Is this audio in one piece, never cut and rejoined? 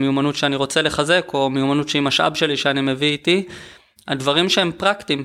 yes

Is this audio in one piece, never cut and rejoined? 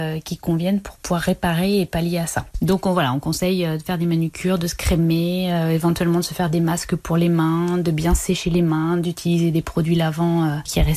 yes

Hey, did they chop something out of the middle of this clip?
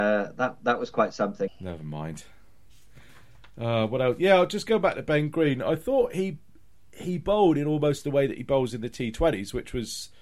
yes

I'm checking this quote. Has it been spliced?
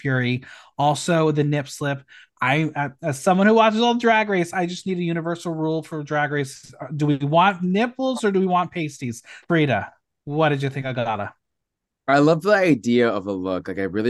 yes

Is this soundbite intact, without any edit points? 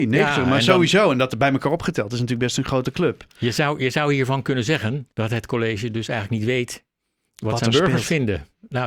no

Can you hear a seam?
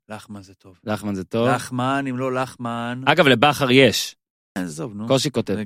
yes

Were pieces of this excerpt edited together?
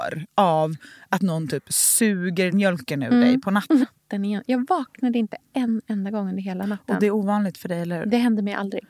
yes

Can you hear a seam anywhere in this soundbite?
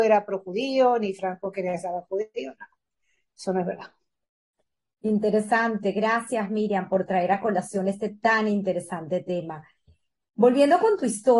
no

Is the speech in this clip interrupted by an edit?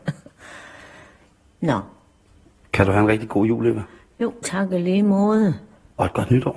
no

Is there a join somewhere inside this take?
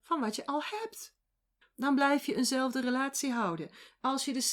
yes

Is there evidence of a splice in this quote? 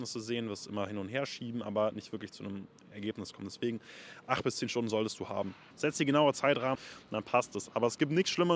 yes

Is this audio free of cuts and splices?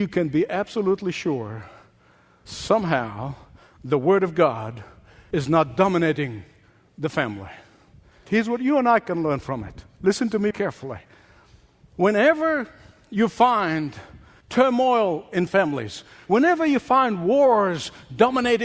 no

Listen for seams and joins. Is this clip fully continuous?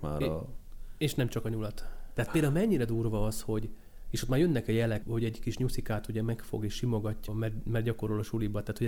no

